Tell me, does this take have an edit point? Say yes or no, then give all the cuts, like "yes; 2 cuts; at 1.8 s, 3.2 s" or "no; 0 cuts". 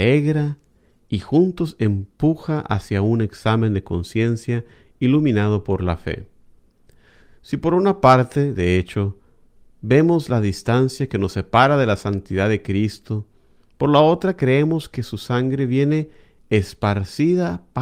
no; 0 cuts